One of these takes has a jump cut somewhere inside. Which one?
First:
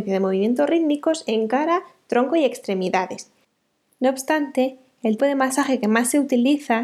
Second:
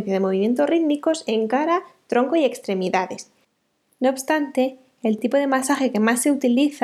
first; 1 cut; at 5.2 s

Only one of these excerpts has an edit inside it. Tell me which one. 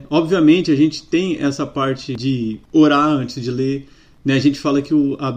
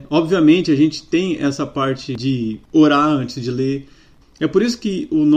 second; 1 cut; at 4.2 s

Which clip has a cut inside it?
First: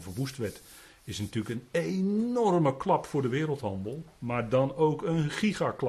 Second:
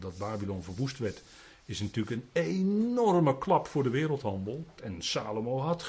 second; 1 cut; at 4.8 s

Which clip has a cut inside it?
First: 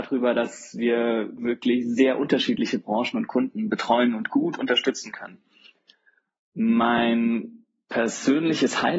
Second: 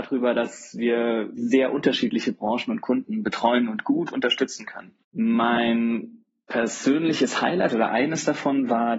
second; 2 cuts; at 1.4 s, 5.0 s

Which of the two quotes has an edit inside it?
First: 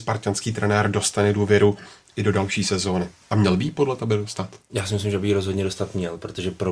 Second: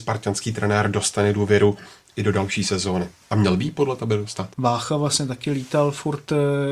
second; 1 cut; at 4.5 s

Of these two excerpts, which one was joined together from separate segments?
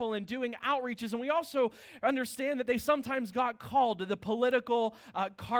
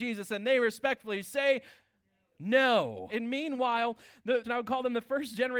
second; 2 cuts; at 3.1 s, 4.4 s

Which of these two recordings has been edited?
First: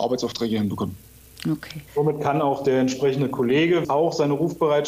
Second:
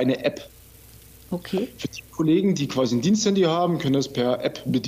first; 2 cuts; at 1.9 s, 3.8 s

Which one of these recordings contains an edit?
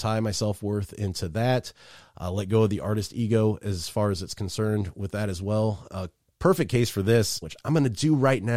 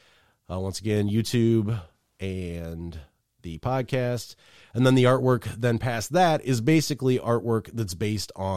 first; 1 cut; at 7.4 s

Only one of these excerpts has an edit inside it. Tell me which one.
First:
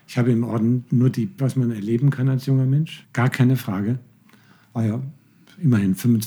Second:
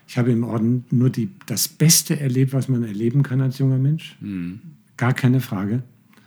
first; 2 cuts; at 1.4 s, 3.0 s

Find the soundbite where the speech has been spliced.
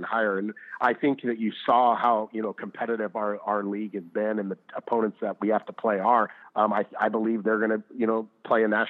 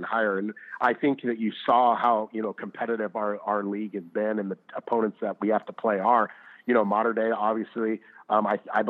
first; 1 cut; at 6.4 s

